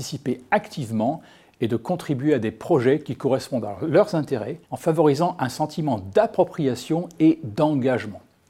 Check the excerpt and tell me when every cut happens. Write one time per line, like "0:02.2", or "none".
0:04.6